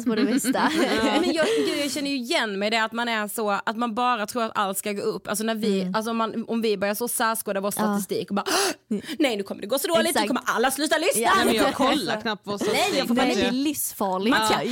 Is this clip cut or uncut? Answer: uncut